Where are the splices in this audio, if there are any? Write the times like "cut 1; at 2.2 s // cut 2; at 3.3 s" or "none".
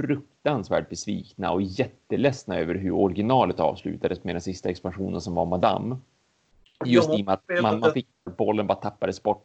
cut 1; at 8.3 s